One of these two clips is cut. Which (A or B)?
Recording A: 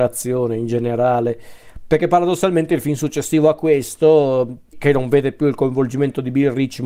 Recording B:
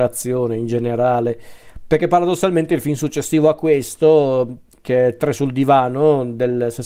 A